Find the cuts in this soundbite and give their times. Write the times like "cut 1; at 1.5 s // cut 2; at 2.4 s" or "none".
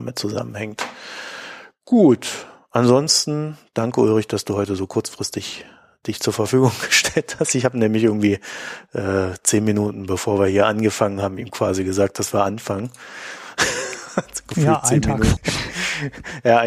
cut 1; at 15.4 s